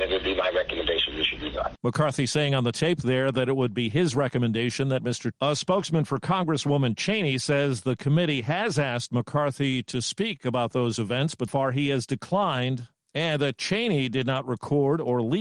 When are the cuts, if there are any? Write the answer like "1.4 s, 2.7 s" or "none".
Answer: 5.3 s, 11.5 s